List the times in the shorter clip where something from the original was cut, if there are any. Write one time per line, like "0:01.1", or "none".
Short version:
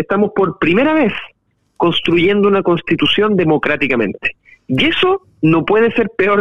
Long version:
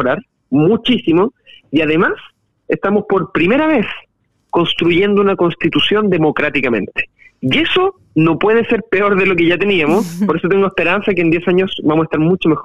none

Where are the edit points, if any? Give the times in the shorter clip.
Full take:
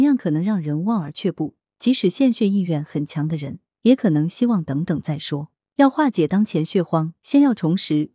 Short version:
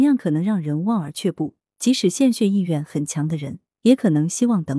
none

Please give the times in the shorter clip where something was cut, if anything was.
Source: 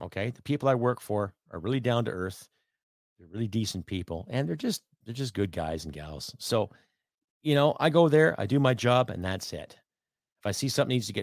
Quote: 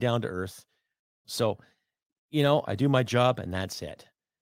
0:01.2
0:02.7

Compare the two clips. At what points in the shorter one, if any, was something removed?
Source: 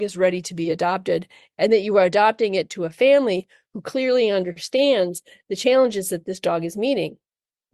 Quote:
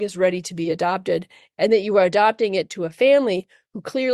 none

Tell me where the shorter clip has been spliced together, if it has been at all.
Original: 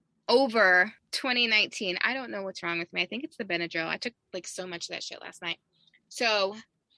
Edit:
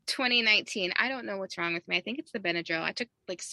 none

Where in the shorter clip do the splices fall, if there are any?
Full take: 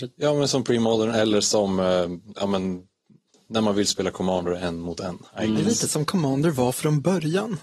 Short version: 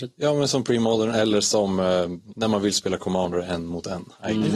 0:02.3

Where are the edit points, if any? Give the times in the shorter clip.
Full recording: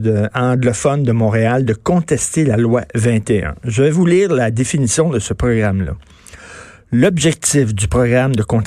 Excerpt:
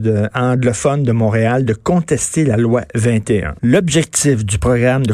0:03.6

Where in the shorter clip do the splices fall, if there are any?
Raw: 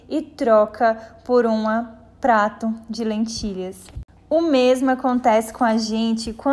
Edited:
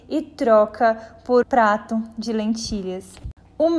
0:01.4

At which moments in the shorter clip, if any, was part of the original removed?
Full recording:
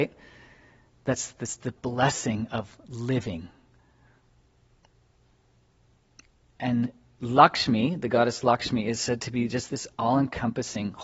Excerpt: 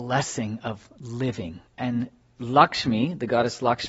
0:01.7

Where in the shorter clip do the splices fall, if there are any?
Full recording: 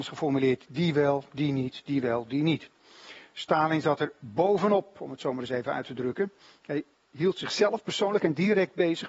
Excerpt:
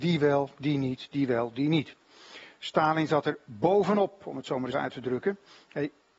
0:04.7

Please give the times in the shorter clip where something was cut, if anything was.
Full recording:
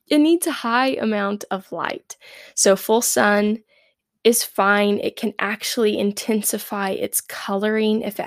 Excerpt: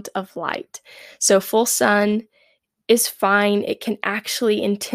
none

